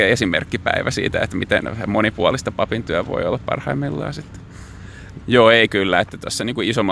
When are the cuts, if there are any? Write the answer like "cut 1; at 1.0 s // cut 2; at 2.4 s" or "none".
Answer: cut 1; at 5.2 s